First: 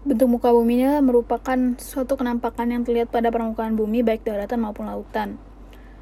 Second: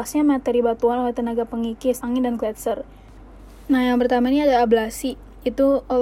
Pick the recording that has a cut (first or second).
second